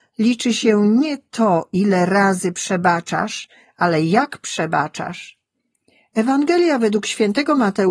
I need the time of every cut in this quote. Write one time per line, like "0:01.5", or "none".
none